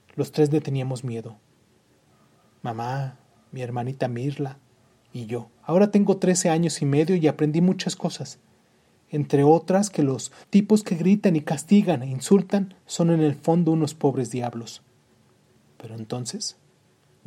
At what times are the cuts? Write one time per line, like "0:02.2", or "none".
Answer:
0:05.6
0:10.4
0:12.8